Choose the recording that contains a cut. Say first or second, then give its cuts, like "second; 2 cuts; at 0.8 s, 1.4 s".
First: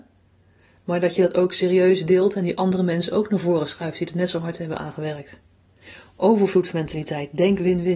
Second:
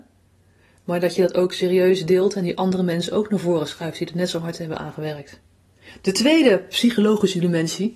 second; 1 cut; at 5.9 s